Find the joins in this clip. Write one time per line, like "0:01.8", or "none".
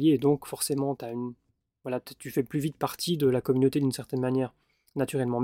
none